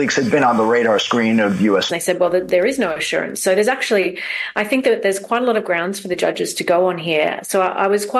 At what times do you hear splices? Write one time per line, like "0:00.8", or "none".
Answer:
0:01.9